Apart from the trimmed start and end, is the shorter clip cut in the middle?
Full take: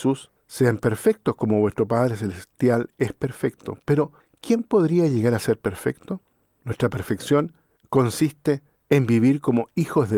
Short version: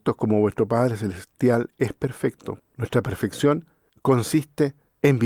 yes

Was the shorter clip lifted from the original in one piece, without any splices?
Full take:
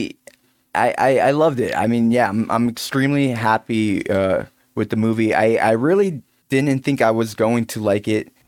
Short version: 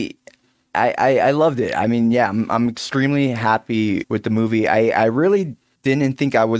no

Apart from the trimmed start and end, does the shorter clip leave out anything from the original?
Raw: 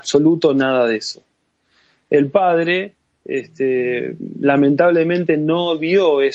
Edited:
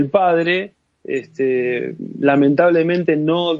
no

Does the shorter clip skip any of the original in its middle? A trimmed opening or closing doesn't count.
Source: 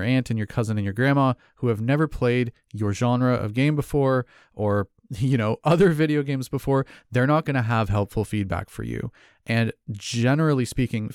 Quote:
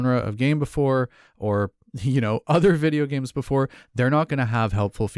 no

